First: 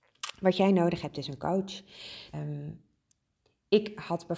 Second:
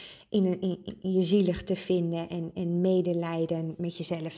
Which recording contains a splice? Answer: first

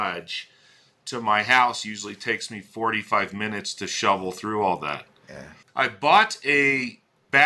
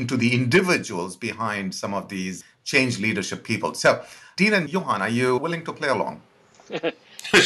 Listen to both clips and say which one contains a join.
first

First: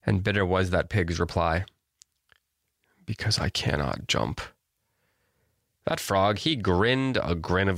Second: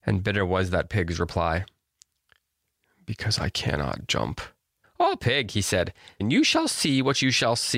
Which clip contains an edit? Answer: second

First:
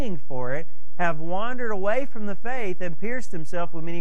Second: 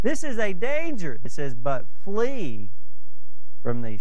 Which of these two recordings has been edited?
second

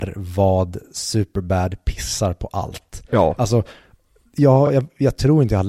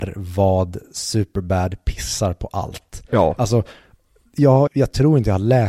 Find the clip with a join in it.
second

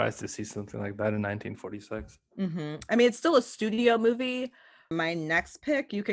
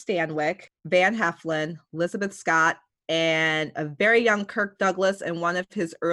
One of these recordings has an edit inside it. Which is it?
first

